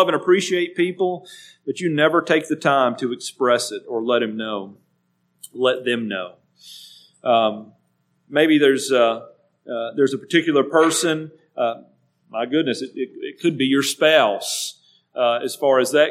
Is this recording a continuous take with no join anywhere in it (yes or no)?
yes